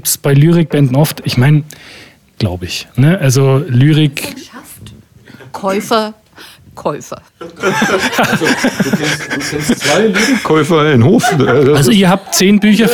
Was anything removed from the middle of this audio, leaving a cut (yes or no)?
yes